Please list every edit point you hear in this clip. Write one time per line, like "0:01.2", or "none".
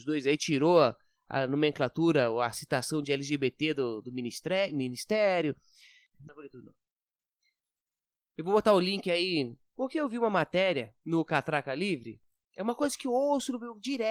0:06.3
0:09.6
0:11.0